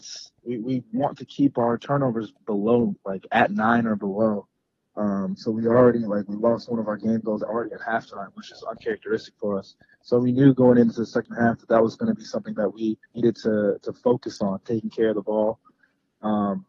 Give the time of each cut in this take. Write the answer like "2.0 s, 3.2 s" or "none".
13.0 s